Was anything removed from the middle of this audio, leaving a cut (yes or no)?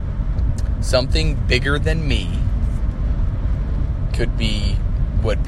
no